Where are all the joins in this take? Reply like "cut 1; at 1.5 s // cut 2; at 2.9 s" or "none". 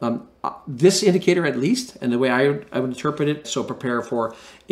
cut 1; at 3.4 s